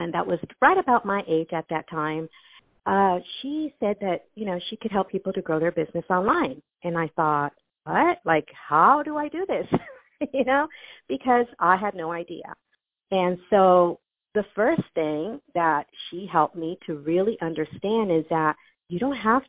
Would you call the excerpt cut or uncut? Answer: uncut